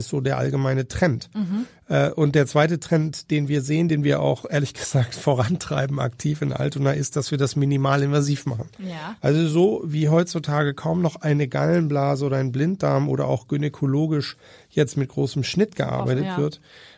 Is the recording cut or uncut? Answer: uncut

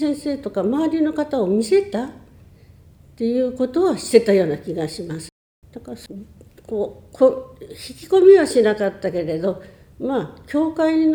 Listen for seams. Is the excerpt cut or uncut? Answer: cut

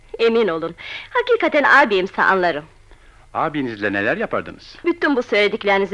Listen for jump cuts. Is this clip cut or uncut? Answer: cut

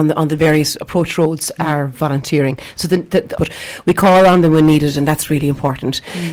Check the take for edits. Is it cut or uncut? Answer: cut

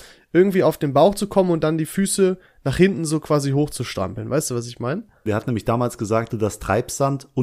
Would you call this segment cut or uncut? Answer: cut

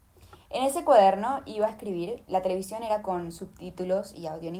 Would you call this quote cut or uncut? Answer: cut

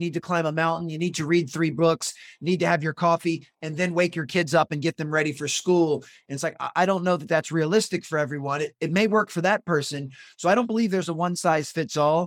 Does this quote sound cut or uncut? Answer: uncut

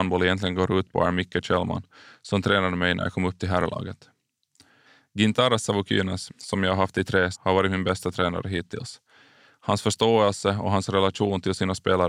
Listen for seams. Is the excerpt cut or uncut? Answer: cut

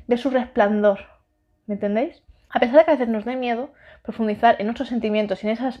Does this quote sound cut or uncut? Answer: cut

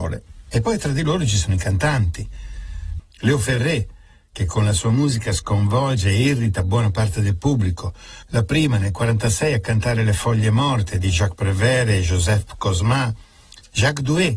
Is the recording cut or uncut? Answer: cut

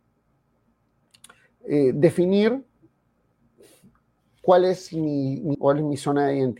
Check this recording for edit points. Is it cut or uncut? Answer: cut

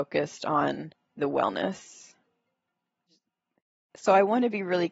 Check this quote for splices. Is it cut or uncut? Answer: uncut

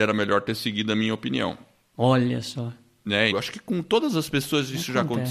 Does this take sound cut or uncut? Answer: cut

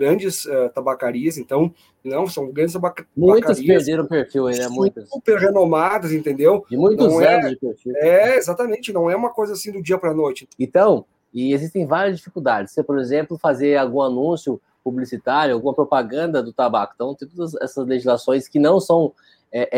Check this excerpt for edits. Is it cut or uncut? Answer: cut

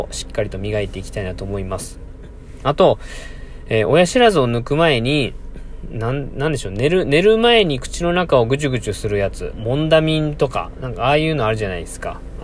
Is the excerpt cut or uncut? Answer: cut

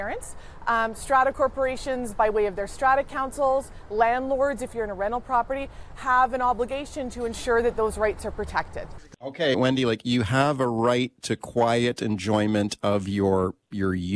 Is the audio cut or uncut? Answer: cut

